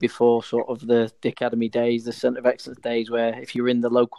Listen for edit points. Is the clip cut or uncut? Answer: uncut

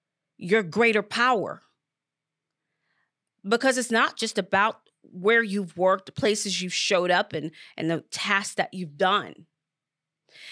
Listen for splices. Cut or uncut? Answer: uncut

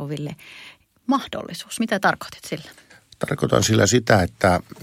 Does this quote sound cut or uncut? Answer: uncut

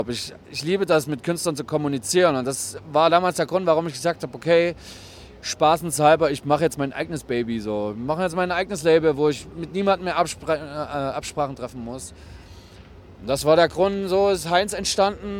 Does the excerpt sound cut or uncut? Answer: uncut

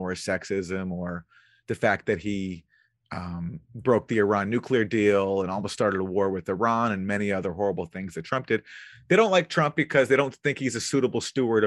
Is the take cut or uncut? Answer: uncut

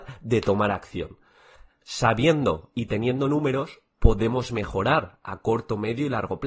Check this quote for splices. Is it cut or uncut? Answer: cut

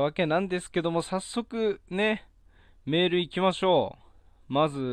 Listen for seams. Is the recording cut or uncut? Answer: uncut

